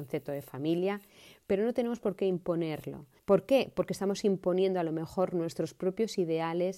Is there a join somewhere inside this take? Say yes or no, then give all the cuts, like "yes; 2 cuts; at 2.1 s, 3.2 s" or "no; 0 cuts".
yes; 1 cut; at 3.2 s